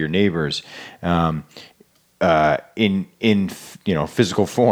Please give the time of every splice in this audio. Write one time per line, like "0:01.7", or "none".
none